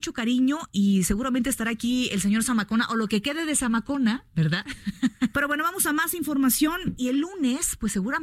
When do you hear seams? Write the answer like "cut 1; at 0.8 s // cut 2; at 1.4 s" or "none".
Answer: cut 1; at 5.3 s // cut 2; at 7.0 s